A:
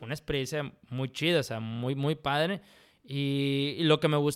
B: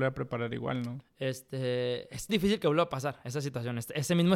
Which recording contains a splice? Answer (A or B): B